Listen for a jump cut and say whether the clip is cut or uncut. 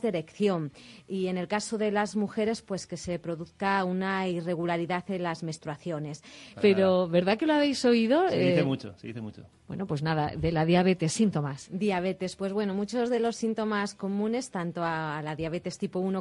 cut